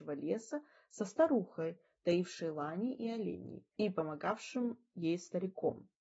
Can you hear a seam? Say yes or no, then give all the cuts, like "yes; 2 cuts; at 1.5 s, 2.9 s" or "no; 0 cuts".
no; 0 cuts